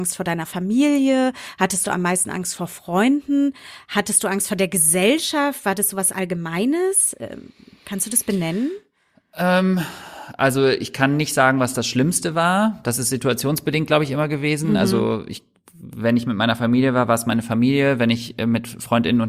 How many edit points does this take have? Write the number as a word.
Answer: zero